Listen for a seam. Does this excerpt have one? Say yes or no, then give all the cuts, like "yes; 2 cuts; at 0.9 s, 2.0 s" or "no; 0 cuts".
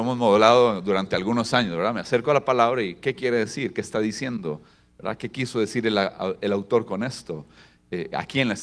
no; 0 cuts